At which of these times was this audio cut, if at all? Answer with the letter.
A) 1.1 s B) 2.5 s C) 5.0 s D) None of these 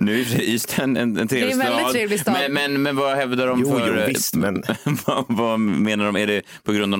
D